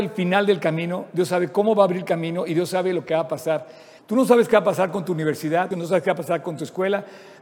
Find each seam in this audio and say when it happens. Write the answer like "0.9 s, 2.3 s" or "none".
4.0 s, 5.7 s